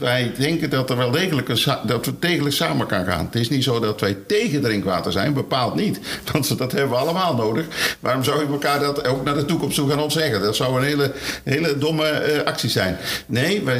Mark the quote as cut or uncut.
uncut